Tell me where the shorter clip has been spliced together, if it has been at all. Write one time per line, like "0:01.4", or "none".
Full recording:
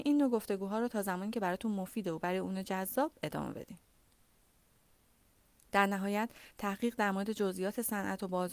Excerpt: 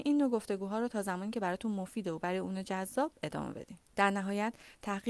0:03.8